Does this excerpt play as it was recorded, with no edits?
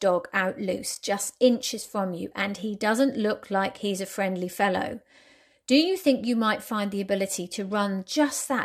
yes; 0 cuts

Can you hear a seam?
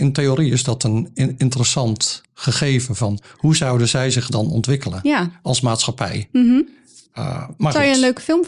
no; 0 cuts

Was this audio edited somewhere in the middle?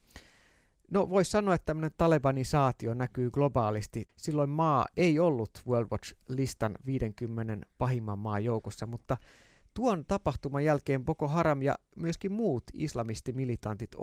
yes; 1 cut; at 4.1 s

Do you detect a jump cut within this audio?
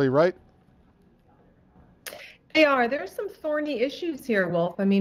no; 0 cuts

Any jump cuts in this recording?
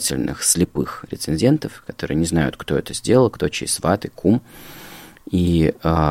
no; 0 cuts

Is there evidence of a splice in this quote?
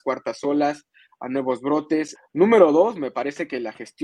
yes; 1 cut; at 2.1 s

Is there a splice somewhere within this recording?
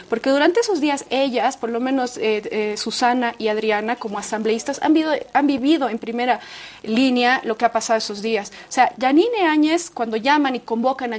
no; 0 cuts

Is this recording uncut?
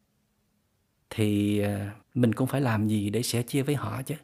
no; 1 cut; at 2.0 s

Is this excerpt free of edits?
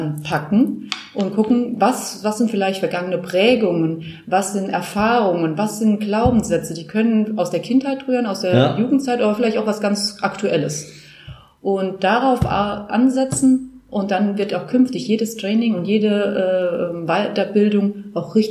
yes; 0 cuts

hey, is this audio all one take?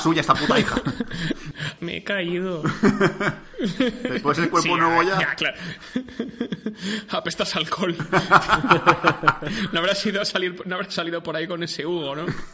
no; 1 cut; at 1.8 s

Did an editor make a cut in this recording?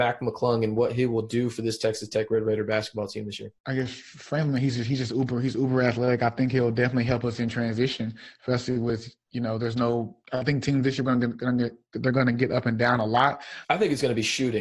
yes; 2 cuts; at 3.6 s, 13.6 s

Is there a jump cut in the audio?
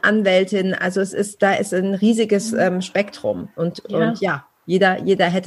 no; 0 cuts

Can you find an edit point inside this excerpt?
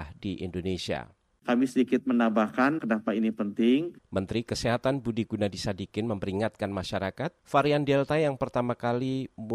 yes; 3 cuts; at 2.8 s, 4.0 s, 7.4 s

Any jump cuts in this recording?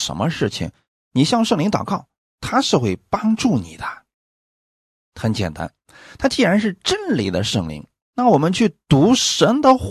yes; 2 cuts; at 5.0 s, 8.0 s

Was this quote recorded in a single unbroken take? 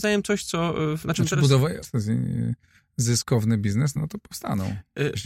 no; 2 cuts; at 1.8 s, 4.0 s

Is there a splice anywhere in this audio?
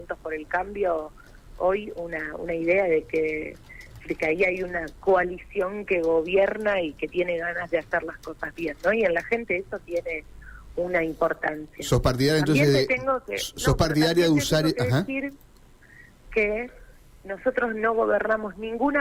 no; 0 cuts

